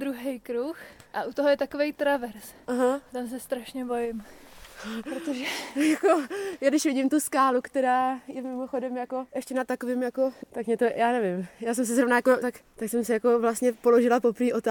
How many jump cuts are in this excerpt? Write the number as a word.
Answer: two